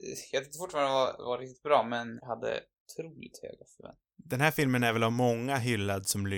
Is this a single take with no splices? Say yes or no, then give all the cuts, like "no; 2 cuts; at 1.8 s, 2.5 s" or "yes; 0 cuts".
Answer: no; 1 cut; at 2.2 s